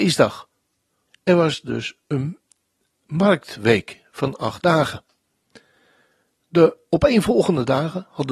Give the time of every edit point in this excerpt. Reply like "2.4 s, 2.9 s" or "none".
1.1 s

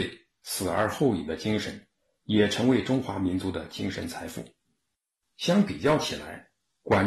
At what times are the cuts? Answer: 5.2 s

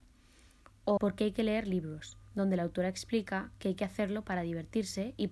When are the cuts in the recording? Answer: 1.0 s

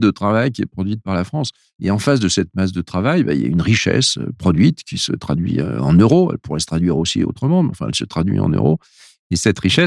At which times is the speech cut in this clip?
none

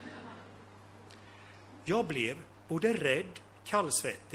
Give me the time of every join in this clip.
none

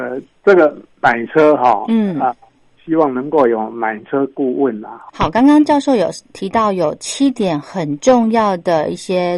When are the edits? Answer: 5.1 s

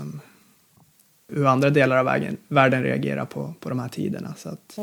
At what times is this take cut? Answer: 1.3 s

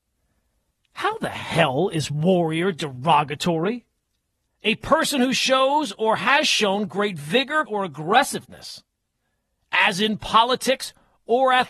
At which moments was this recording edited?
4.5 s, 7.7 s

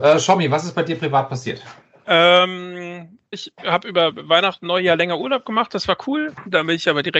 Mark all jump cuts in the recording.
3.3 s

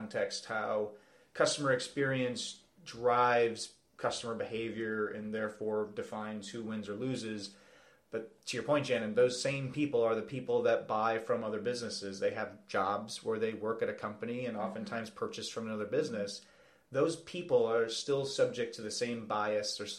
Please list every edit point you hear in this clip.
none

